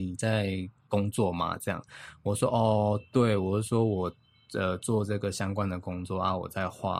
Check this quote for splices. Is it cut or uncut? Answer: uncut